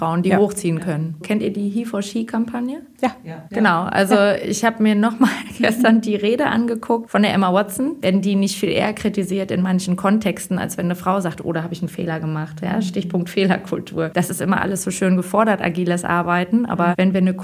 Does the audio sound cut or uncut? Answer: cut